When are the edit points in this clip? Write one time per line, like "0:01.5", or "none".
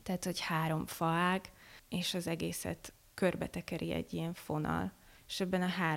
0:01.8

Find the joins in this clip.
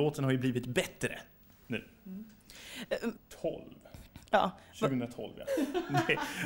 0:03.1
0:05.5

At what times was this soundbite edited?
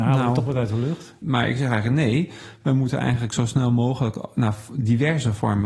0:01.2

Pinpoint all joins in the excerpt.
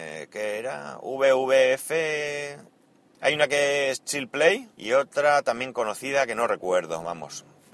0:03.1
0:04.7

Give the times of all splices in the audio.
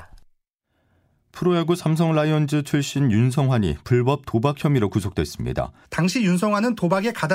0:05.8

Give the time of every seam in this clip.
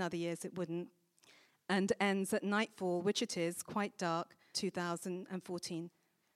0:04.5

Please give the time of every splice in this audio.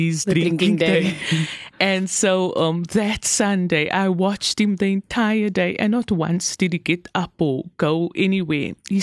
none

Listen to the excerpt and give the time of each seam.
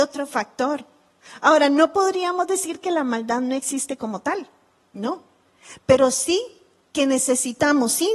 none

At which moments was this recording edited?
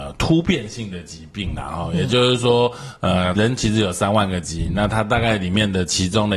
0:03.3

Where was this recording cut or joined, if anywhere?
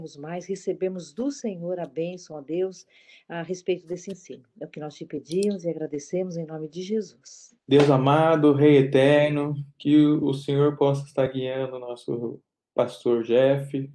0:07.6

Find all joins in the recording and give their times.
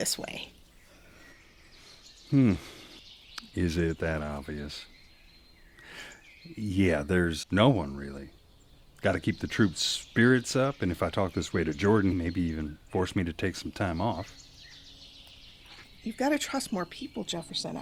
0:07.4
0:12.1

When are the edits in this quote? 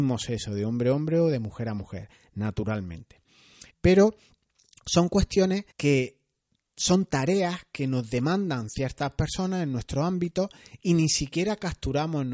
0:03.7
0:05.7

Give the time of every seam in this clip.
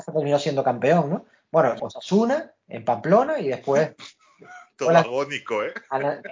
0:01.8

